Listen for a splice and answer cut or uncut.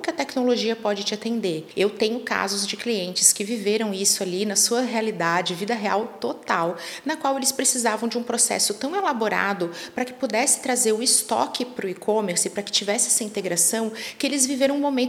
uncut